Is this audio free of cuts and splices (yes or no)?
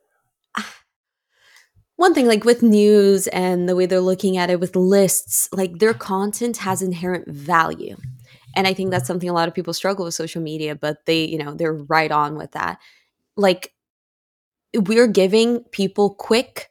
yes